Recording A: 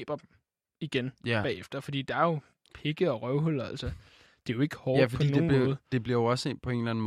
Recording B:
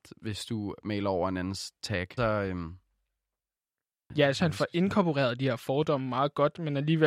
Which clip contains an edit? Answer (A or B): B